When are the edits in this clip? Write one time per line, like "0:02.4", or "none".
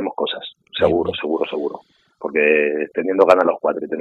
none